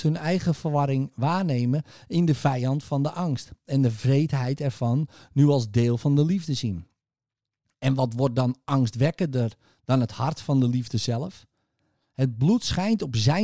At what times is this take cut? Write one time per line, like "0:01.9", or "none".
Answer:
none

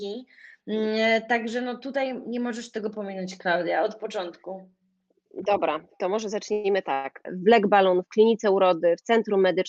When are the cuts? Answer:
0:07.2

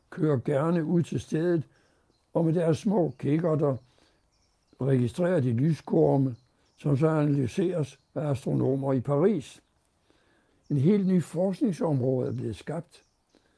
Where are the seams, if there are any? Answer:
0:10.5

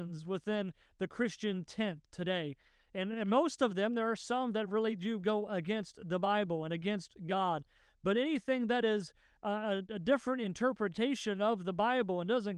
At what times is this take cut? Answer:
none

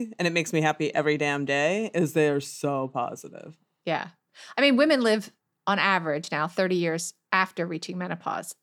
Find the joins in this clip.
none

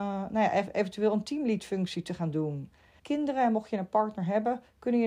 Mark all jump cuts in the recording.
0:03.0

